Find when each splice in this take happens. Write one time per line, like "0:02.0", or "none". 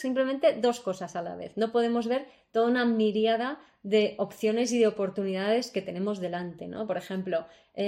none

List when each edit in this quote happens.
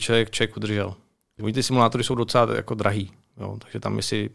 0:01.4

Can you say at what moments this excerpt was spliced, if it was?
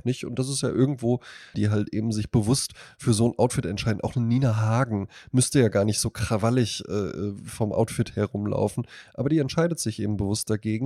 0:01.5

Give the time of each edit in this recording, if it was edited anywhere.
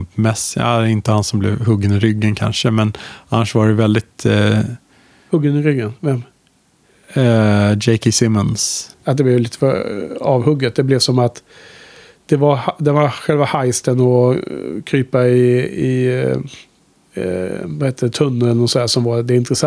0:08.9

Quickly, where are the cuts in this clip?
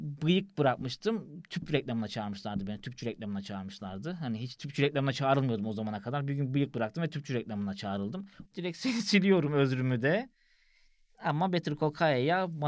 0:08.4

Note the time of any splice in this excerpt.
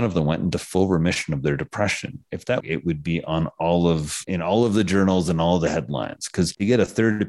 0:02.6
0:04.2

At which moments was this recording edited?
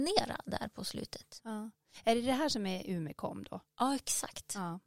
none

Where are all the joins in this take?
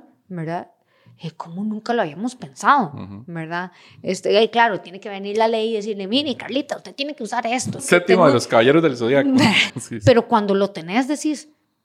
0:07.8
0:09.7

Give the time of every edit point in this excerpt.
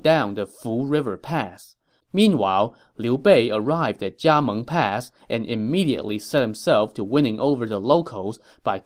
0:02.0

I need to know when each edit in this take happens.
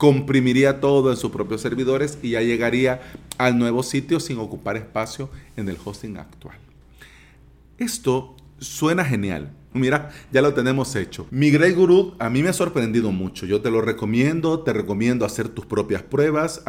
0:09.7

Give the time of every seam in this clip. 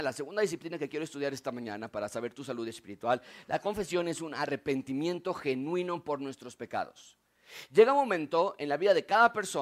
none

